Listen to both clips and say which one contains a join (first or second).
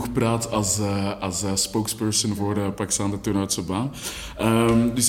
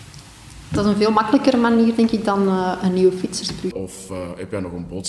second